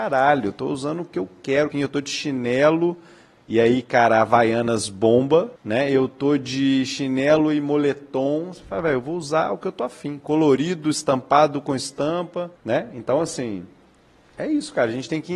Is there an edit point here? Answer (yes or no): yes